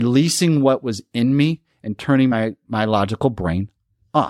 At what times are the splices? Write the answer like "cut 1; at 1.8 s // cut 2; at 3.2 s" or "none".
none